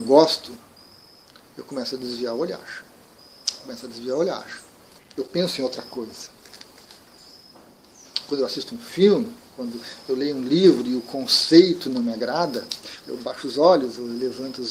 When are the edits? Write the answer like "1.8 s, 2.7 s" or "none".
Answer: 5.0 s, 13.0 s